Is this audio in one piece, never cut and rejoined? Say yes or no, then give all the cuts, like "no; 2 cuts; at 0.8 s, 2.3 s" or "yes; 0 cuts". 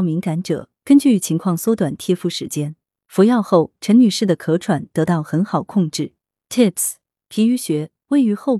no; 2 cuts; at 2.9 s, 6.4 s